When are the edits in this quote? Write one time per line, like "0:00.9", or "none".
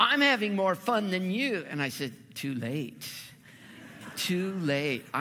none